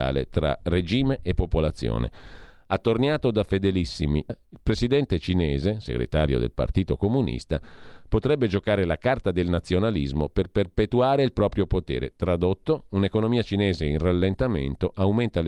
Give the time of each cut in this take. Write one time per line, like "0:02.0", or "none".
0:04.3